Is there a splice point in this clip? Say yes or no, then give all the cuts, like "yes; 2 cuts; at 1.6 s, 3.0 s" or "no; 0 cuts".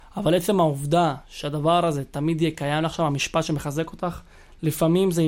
no; 0 cuts